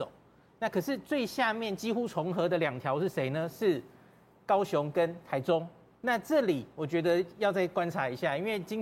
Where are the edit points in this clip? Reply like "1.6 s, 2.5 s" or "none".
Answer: 5.9 s